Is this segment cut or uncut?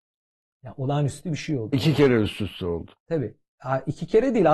cut